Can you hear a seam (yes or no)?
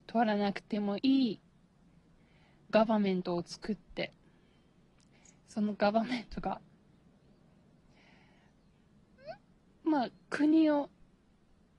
yes